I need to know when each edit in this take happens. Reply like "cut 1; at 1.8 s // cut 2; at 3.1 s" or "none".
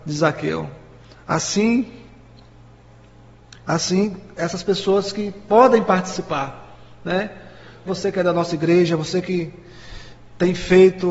cut 1; at 7.9 s